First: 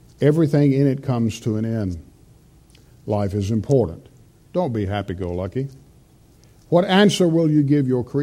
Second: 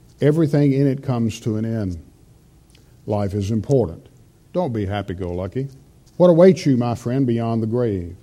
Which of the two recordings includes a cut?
second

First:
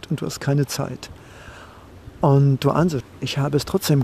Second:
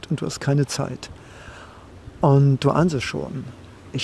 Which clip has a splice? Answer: first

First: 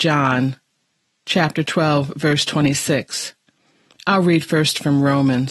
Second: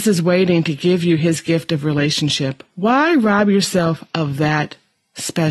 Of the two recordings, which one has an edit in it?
second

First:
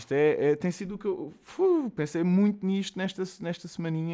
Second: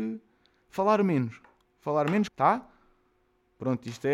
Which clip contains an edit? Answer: second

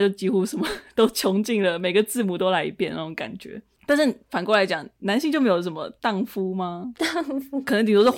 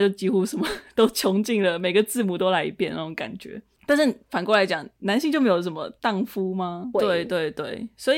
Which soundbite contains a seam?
second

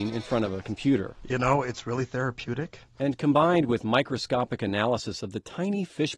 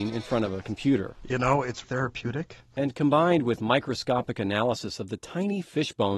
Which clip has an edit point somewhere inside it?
second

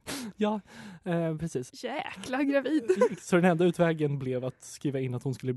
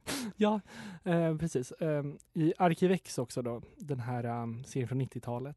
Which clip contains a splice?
first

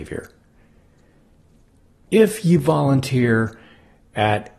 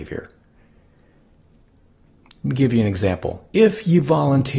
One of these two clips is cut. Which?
first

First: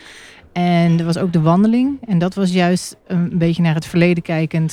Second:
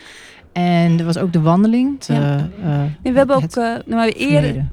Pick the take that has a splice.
second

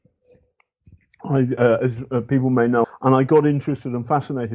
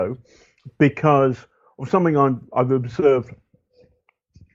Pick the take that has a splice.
first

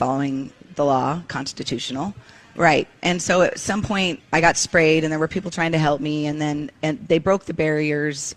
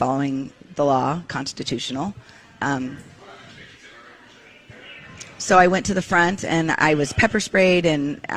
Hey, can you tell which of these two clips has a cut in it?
first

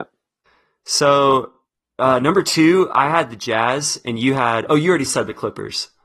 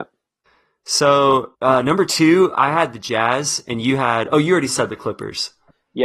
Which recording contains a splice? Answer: second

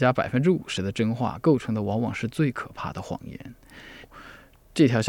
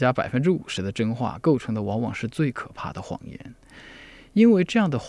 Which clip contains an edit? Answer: first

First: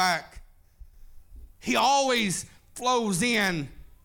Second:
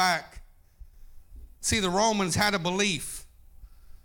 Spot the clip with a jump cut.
first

